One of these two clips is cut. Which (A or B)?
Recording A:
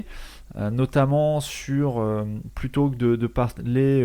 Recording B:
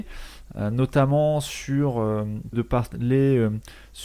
B